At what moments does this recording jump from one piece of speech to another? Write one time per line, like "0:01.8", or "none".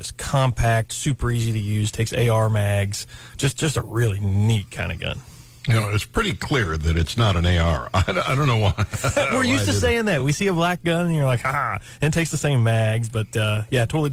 none